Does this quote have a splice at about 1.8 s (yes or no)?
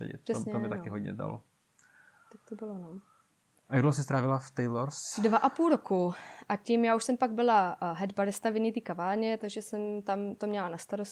no